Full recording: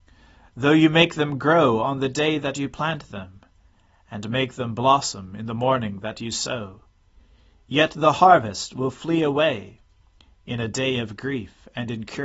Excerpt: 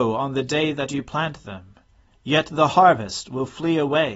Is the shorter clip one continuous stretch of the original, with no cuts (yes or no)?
no